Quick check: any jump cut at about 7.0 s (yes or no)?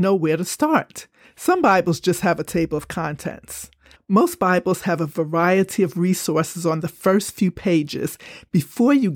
no